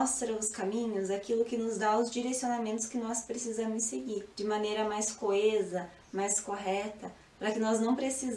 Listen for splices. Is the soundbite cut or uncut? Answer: cut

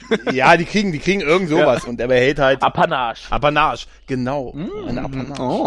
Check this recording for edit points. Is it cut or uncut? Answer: cut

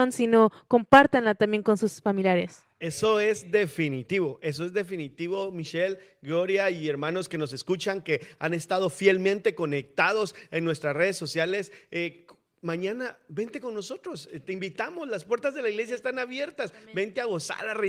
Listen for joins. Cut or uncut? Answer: uncut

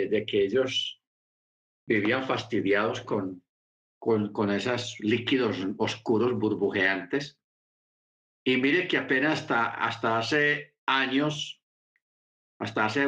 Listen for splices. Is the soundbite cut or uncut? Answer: uncut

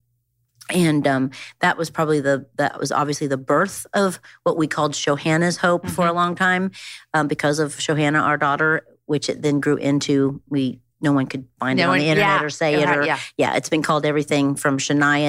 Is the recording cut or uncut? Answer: uncut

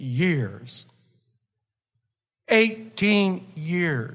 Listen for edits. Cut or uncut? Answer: uncut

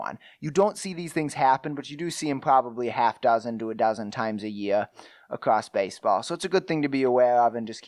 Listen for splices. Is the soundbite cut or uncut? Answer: uncut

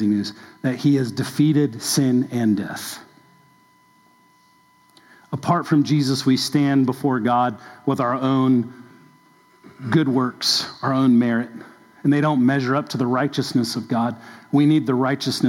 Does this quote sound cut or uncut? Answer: uncut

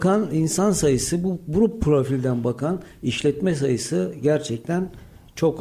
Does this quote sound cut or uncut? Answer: uncut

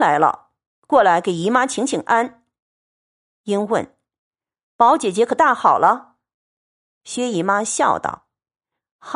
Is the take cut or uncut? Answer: uncut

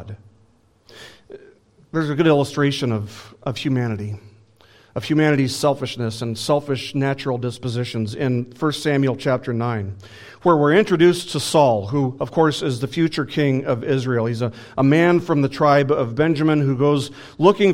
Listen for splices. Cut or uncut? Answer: uncut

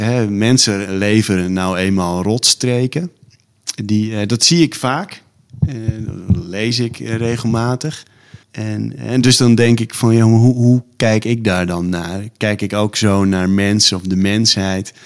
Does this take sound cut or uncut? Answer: cut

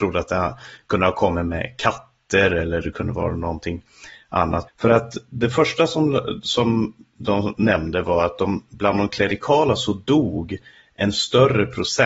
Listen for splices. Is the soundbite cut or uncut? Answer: cut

